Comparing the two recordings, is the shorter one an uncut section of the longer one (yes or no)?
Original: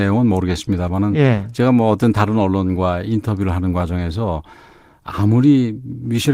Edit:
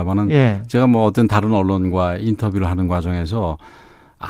yes